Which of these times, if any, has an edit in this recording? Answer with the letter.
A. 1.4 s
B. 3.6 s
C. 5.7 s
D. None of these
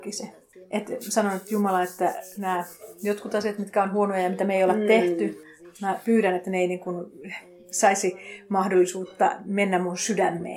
D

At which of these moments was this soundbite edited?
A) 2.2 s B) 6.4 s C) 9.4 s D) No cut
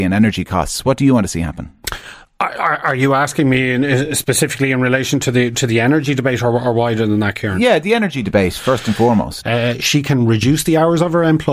C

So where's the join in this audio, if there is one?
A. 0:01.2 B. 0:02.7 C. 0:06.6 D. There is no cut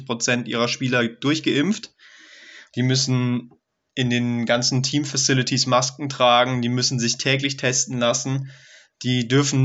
B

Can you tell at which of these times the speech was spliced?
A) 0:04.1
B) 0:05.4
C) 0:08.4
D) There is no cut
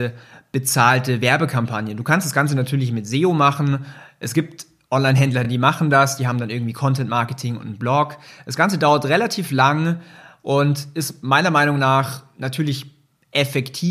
D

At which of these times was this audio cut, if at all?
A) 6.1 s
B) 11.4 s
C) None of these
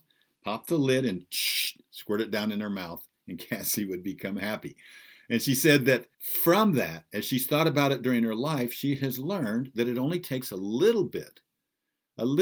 A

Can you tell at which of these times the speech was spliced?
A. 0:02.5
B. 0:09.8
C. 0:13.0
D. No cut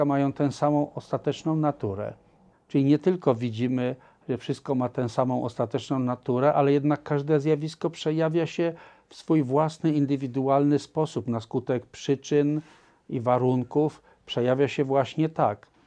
A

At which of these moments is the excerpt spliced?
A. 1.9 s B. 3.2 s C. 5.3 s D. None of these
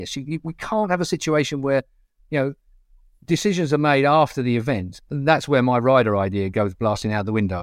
D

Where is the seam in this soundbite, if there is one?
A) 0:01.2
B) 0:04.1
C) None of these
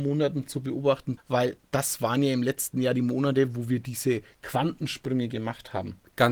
A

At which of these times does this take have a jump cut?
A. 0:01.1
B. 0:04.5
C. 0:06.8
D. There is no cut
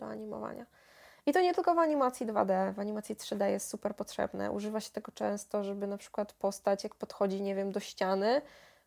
D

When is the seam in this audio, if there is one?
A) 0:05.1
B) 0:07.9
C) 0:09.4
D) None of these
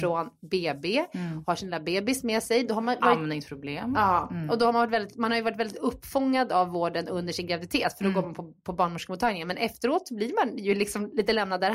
D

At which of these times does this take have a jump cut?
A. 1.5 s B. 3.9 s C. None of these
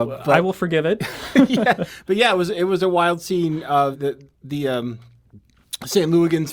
B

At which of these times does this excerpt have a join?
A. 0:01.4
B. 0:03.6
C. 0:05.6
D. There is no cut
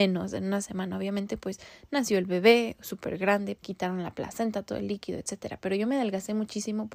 B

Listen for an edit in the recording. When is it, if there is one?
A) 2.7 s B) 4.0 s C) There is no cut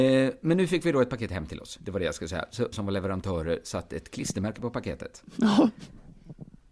A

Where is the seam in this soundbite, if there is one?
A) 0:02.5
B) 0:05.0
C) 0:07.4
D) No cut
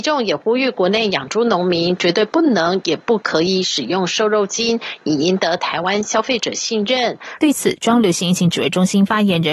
C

